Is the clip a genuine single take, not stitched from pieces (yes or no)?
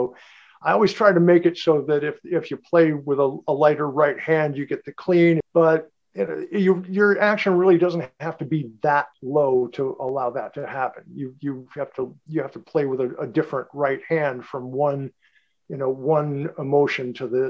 no